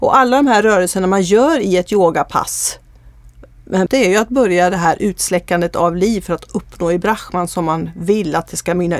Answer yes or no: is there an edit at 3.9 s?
yes